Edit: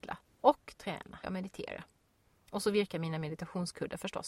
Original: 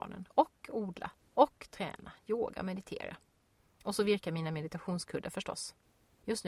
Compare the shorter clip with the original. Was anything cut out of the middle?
yes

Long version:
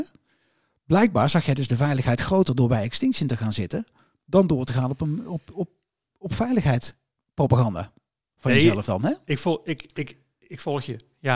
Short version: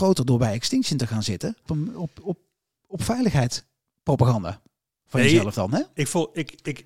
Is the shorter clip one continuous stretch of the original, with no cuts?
no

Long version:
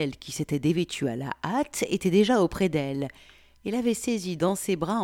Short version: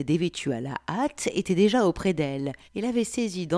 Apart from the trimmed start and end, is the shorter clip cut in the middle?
yes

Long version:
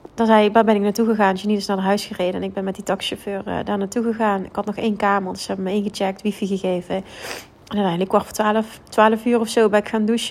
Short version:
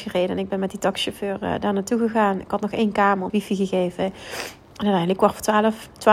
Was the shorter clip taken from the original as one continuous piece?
no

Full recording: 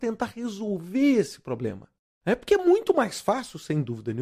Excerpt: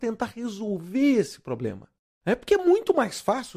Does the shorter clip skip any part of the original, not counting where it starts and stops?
no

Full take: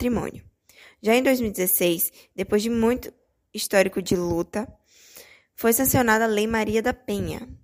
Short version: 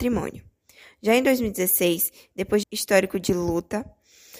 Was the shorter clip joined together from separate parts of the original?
yes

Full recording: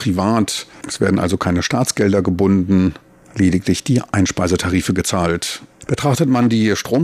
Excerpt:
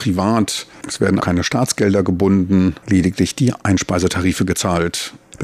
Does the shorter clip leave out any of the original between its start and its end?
yes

